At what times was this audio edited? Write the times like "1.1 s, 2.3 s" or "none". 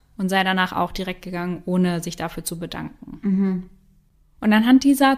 none